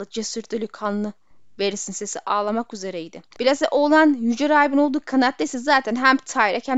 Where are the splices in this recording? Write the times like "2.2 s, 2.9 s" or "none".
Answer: 3.3 s